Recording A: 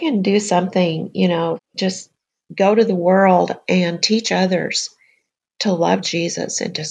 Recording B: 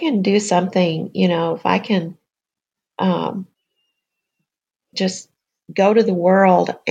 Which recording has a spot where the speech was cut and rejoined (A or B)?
A